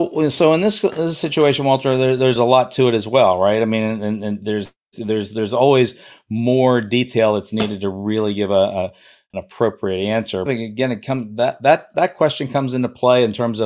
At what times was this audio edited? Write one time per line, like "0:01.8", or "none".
0:10.5